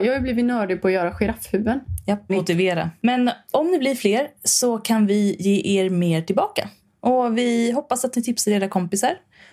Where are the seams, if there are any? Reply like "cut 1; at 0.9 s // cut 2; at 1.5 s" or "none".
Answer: cut 1; at 2.3 s